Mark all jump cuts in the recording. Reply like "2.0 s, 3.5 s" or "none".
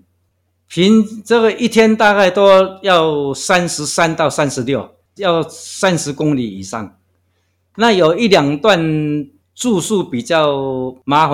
5.2 s